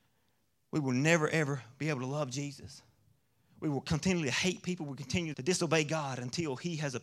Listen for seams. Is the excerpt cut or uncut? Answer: cut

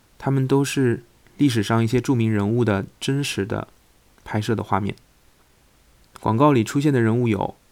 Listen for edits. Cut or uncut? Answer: uncut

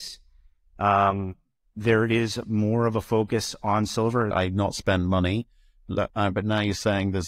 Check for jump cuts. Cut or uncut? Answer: cut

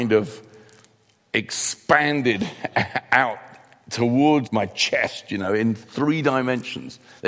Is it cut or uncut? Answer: cut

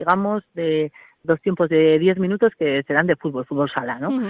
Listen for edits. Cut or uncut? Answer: cut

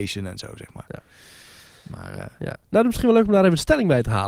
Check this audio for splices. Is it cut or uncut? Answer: uncut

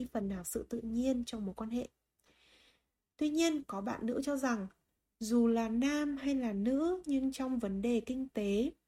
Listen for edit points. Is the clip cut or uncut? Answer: uncut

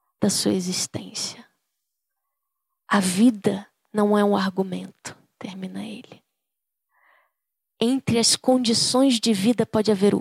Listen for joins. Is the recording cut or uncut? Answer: uncut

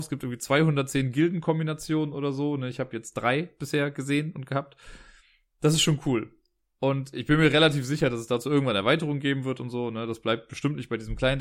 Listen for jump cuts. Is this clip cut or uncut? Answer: uncut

